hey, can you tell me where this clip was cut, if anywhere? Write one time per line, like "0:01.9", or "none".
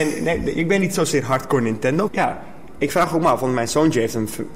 0:02.1